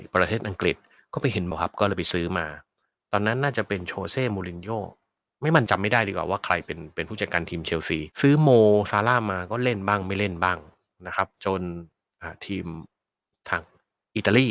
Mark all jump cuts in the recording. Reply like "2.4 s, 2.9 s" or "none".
1.5 s, 5.7 s, 8.1 s